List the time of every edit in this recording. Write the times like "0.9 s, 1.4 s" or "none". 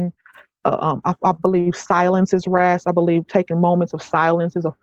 none